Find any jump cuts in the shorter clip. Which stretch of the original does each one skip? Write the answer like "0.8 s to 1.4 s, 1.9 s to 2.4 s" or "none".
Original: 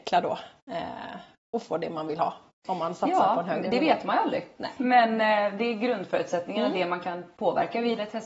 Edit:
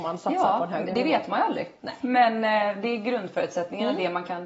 none